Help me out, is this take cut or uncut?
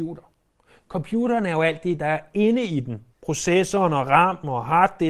cut